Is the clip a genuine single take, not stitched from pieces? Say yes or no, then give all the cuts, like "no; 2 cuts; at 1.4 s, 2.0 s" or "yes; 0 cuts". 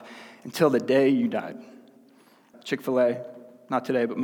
no; 1 cut; at 2.5 s